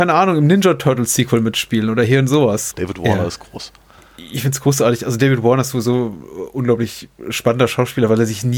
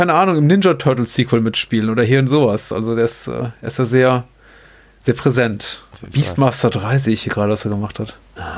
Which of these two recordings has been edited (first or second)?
first